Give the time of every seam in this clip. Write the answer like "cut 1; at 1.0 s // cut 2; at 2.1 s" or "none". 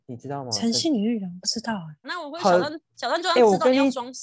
cut 1; at 2.0 s